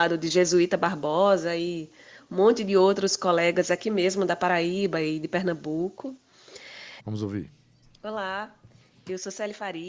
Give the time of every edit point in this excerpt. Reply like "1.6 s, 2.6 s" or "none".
7.0 s